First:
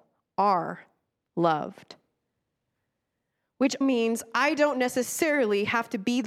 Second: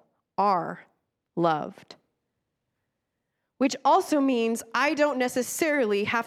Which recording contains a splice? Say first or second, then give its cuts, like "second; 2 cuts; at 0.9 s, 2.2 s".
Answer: first; 1 cut; at 3.8 s